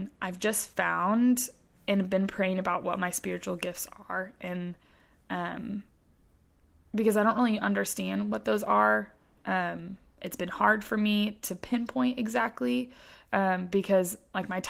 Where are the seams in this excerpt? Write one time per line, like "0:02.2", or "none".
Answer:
none